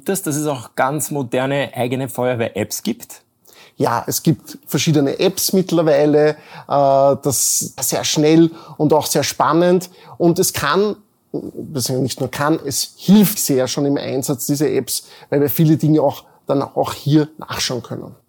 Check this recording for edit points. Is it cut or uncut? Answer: cut